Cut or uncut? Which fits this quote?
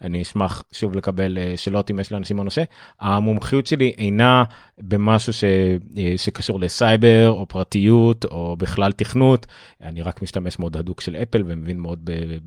uncut